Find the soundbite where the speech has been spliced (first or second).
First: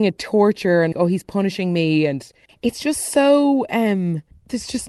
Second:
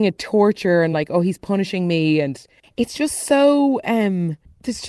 first